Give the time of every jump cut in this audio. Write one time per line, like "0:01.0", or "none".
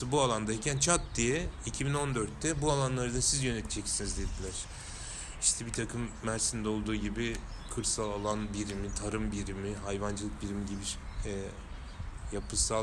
none